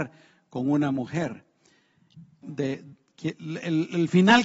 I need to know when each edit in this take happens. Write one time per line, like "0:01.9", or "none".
0:02.4